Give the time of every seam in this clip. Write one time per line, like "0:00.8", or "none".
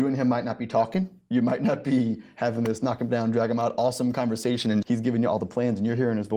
0:04.8

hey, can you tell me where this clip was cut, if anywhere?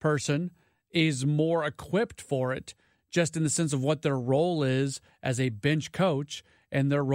none

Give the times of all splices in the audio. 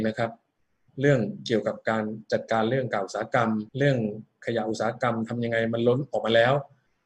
0:03.7

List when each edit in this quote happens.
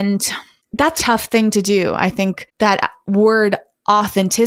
0:01.0

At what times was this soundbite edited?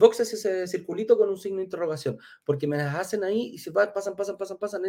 none

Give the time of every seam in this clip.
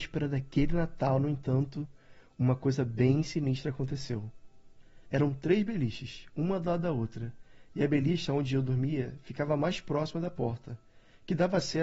0:05.0

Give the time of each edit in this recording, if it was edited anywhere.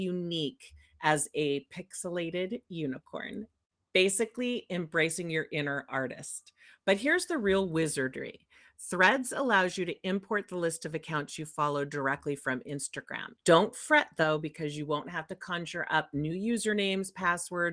0:13.4

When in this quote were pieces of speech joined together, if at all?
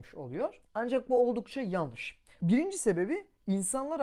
0:02.4

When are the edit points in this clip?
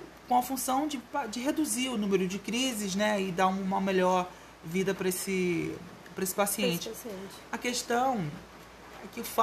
none

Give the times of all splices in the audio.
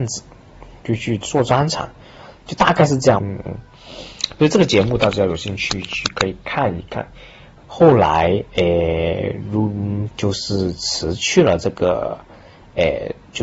0:03.2
0:07.6
0:10.1

